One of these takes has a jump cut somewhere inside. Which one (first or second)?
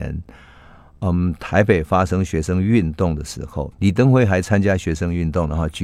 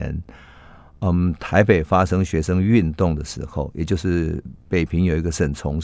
first